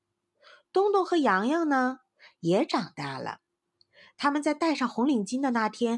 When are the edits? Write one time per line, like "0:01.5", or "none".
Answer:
none